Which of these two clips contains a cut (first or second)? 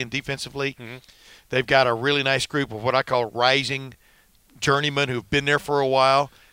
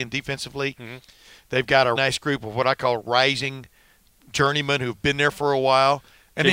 second